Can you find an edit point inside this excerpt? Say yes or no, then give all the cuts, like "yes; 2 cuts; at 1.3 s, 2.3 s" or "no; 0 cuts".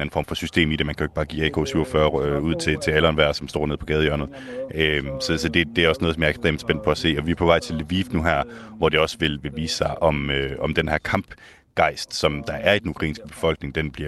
no; 0 cuts